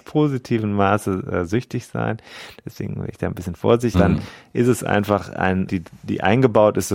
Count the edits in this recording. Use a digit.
2